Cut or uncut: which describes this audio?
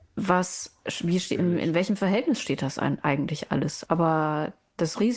cut